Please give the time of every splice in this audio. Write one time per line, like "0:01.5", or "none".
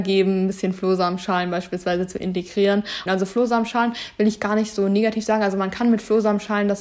0:03.1